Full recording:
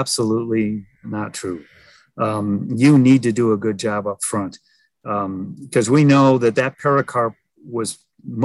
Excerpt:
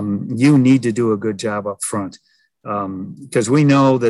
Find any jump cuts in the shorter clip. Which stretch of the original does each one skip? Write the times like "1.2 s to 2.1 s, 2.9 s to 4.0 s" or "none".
none